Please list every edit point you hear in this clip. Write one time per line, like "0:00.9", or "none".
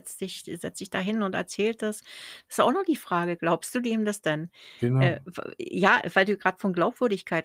none